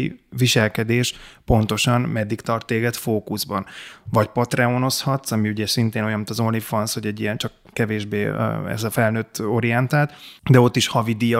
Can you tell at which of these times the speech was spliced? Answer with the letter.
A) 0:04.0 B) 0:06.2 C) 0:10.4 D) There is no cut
C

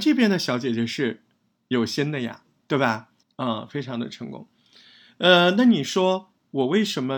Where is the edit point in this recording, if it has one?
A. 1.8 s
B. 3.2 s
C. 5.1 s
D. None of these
B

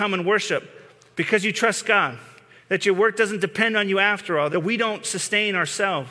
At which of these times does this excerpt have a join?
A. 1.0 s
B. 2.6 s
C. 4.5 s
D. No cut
C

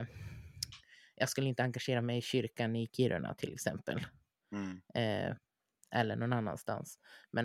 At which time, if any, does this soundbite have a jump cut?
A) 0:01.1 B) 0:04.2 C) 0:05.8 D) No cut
D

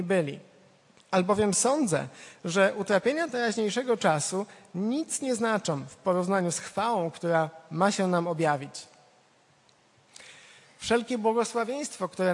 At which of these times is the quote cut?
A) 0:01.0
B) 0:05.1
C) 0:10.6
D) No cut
C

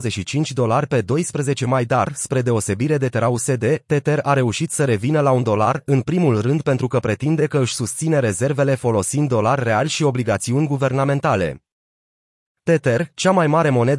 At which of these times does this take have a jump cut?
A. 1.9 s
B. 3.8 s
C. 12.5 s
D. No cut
C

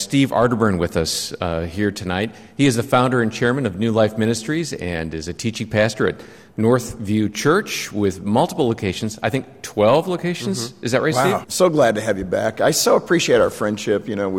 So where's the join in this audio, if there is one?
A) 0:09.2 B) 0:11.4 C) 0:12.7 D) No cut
B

